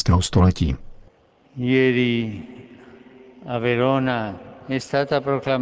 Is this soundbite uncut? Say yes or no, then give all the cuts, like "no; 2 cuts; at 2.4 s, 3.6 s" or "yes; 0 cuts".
yes; 0 cuts